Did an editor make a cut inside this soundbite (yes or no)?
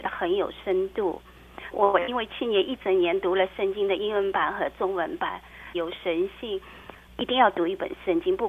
yes